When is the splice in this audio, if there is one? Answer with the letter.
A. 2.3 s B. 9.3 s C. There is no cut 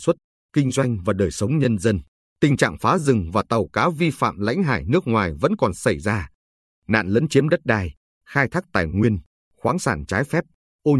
A